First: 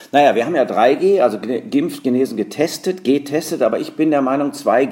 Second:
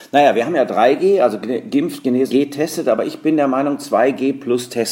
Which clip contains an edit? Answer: second; 1 cut; at 2.3 s

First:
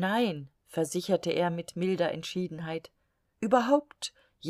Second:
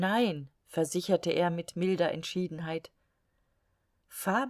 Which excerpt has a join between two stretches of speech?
first; 1 cut; at 3.3 s

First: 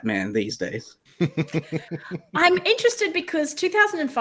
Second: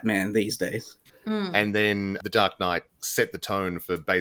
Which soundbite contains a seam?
second; 1 cut; at 1.1 s

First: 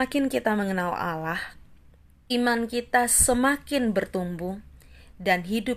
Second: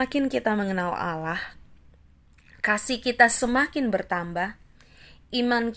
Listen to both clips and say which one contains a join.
first; 1 cut; at 2.3 s

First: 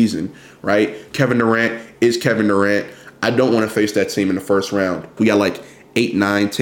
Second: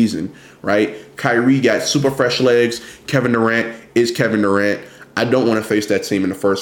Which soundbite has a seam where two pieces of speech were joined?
first; 2 cuts; at 1.1 s, 5.2 s

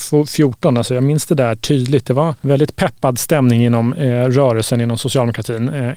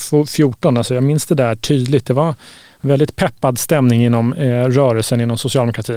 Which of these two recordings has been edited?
first; 1 cut; at 2.4 s

